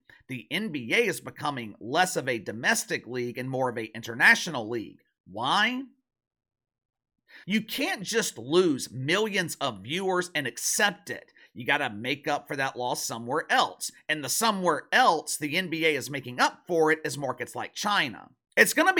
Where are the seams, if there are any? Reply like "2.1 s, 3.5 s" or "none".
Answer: 7.4 s